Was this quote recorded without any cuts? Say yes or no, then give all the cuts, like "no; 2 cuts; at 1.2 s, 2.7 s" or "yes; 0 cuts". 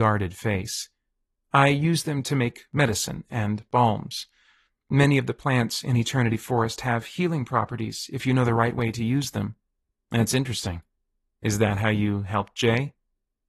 yes; 0 cuts